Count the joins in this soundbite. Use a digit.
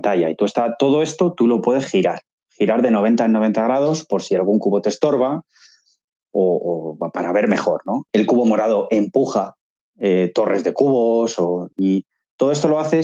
2